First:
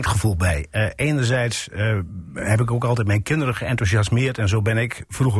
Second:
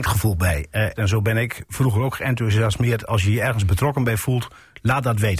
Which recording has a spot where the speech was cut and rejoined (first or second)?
second